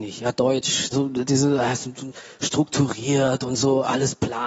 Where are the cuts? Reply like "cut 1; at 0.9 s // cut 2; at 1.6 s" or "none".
cut 1; at 0.9 s